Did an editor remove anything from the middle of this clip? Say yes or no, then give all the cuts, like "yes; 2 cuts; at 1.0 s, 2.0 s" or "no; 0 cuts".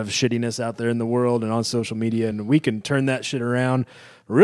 no; 0 cuts